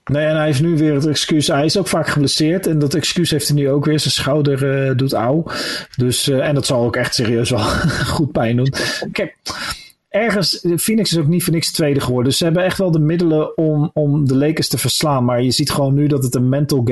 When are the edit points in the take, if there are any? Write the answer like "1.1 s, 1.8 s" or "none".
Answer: 9.1 s